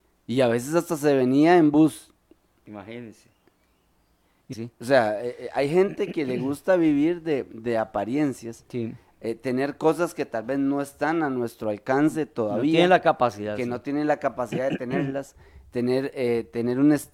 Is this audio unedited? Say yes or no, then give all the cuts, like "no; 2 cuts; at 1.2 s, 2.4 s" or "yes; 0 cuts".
no; 1 cut; at 4.5 s